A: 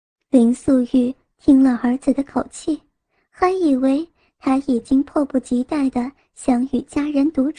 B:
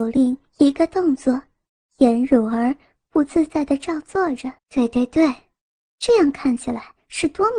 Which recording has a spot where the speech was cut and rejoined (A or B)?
B